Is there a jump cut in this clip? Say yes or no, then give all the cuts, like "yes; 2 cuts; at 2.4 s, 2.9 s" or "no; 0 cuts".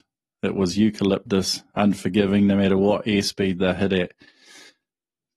no; 0 cuts